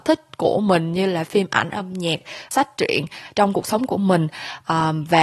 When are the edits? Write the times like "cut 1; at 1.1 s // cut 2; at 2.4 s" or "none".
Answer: cut 1; at 2.5 s